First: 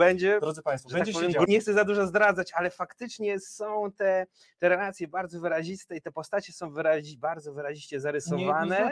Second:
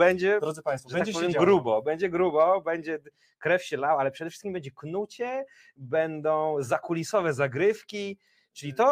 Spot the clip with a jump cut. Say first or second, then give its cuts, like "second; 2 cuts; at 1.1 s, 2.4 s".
first; 1 cut; at 1.5 s